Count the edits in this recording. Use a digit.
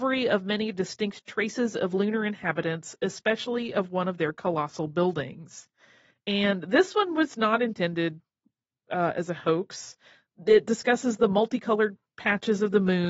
0